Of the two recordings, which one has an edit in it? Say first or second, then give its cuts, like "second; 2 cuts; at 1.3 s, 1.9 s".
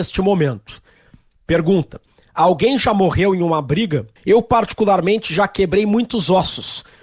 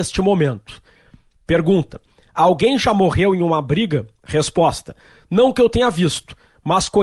first; 1 cut; at 4.2 s